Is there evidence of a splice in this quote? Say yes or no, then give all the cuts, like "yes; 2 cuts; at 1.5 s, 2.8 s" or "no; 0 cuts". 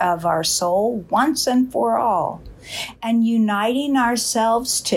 no; 0 cuts